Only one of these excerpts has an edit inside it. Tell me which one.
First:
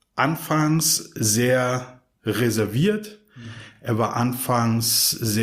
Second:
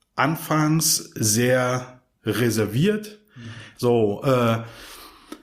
second; 1 cut; at 3.8 s

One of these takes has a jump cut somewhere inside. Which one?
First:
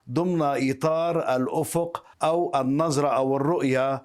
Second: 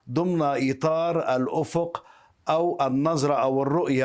first; 1 cut; at 2.1 s

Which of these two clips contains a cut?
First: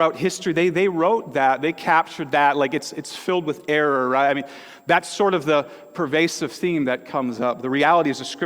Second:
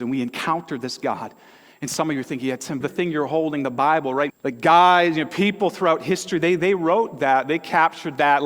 second; 2 cuts; at 2.8 s, 4.3 s

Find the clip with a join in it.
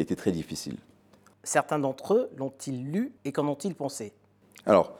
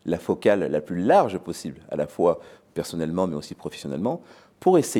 first; 2 cuts; at 1.3 s, 3.2 s

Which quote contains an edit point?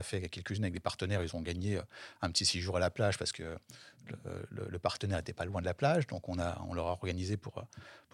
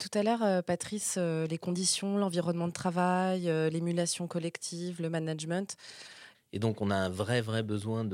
second; 1 cut; at 6.3 s

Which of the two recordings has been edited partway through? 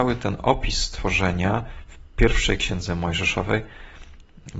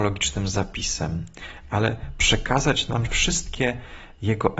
second; 1 cut; at 3.1 s

